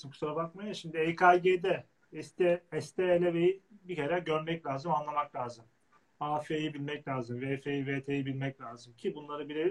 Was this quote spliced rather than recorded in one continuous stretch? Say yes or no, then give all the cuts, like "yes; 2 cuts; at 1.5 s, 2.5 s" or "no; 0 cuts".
no; 0 cuts